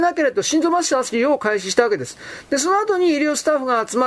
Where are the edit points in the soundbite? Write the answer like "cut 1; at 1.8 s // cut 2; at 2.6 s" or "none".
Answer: none